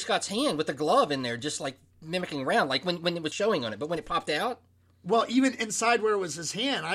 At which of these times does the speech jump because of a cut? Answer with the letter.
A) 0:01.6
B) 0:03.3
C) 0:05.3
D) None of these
B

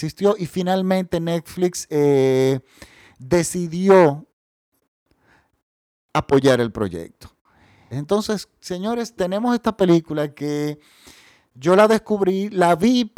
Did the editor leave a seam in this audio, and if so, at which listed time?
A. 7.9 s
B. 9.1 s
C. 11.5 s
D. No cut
A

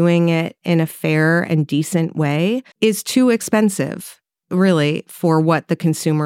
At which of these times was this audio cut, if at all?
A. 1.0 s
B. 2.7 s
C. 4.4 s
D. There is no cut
B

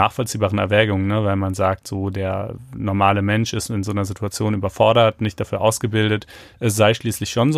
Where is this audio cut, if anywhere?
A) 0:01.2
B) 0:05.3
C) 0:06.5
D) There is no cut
C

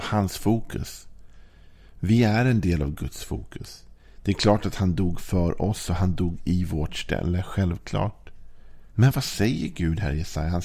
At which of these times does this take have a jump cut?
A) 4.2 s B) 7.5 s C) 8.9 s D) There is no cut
C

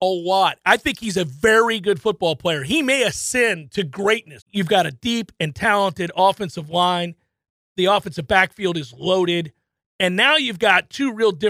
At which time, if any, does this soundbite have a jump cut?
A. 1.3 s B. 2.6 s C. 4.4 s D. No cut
C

